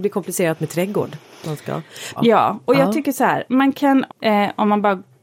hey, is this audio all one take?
no; 2 cuts; at 2.2 s, 4.1 s

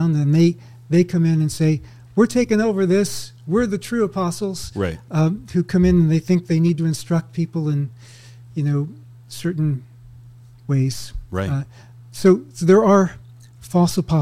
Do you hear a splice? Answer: no; 0 cuts

